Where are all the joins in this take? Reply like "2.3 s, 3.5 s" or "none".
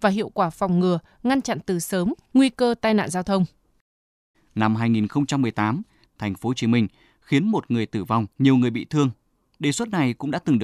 4.3 s, 6.0 s, 8.3 s